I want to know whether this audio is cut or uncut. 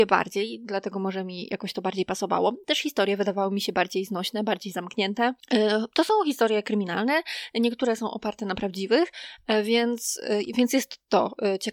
uncut